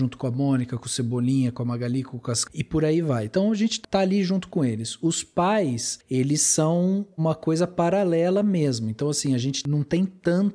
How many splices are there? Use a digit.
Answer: 1